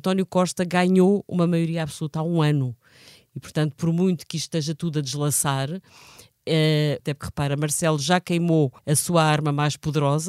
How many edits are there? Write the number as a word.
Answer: two